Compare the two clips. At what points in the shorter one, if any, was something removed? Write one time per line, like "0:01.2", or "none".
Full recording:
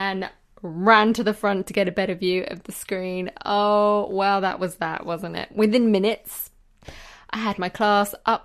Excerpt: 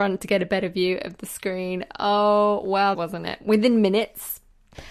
0:02.9

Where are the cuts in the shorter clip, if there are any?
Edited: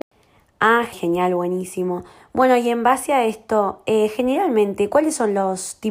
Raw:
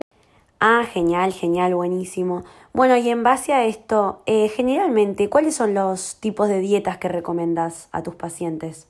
0:00.9

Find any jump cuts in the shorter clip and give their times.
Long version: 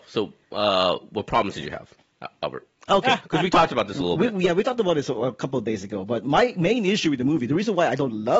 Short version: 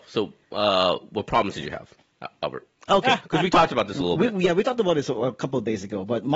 none

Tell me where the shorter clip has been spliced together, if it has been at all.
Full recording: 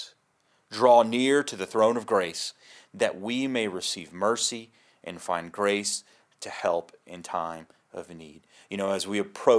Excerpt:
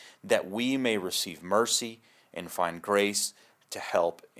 none

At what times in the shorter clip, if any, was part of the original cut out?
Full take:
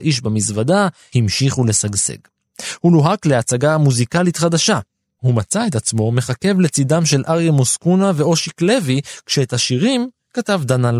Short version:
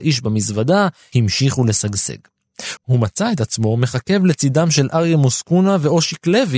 0:02.8

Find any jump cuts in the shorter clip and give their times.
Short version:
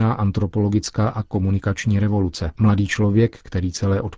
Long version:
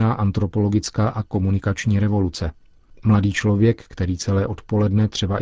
0:02.6

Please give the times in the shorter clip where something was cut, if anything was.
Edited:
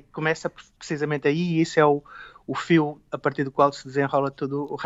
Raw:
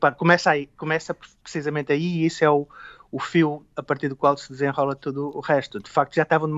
none

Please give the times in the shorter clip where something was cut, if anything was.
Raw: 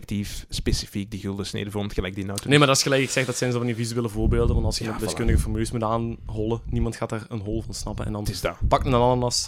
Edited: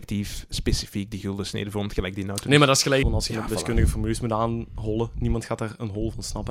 0:03.0

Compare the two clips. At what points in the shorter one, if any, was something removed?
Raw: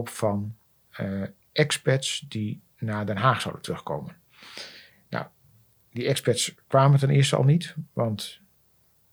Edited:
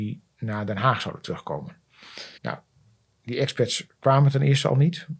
0:02.4

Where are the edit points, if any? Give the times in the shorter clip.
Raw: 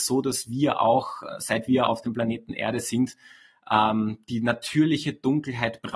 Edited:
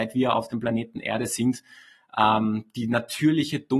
none

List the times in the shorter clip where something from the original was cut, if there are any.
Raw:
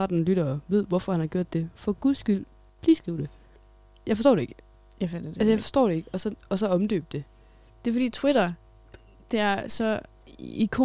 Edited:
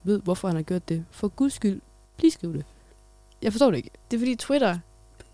0:04.0

